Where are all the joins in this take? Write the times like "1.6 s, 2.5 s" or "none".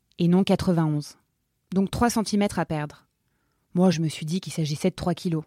3.9 s